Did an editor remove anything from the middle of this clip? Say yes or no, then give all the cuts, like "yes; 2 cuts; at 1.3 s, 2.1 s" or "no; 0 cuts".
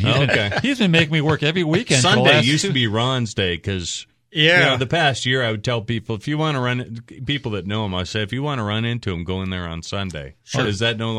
no; 0 cuts